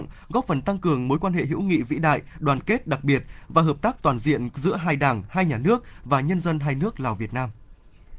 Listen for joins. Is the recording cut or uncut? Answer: uncut